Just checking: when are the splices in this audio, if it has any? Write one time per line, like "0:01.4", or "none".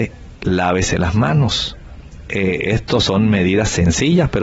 none